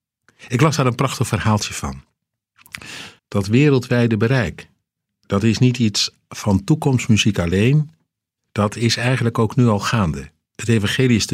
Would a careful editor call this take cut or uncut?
cut